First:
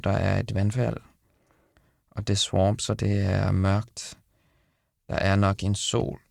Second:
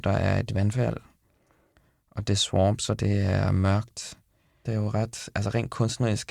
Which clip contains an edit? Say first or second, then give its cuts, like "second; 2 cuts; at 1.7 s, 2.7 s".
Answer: second; 1 cut; at 4.6 s